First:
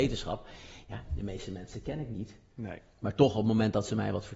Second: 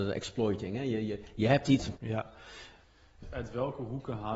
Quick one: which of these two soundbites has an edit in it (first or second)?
second